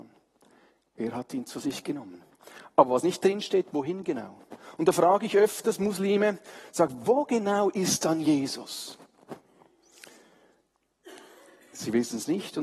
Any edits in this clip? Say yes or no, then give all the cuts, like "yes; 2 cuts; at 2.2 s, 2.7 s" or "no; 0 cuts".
no; 0 cuts